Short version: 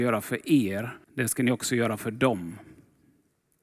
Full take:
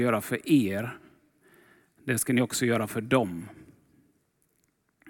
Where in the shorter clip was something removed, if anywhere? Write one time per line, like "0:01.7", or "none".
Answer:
0:01.0